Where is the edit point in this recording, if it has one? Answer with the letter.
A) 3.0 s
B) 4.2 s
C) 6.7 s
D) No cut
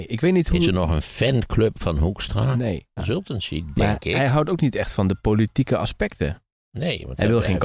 A